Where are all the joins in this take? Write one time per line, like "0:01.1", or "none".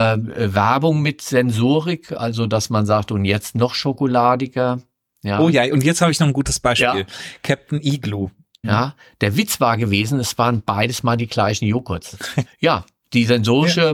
0:08.6
0:12.5